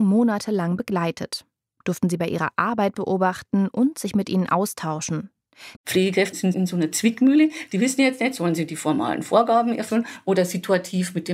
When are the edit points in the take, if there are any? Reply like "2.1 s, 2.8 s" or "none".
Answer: 5.8 s